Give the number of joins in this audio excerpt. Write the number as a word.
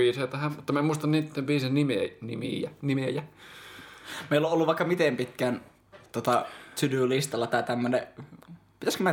zero